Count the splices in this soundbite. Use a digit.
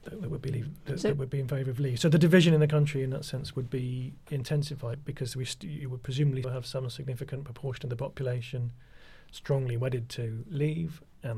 2